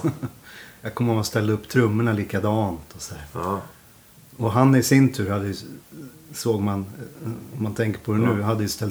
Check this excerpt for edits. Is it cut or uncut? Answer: uncut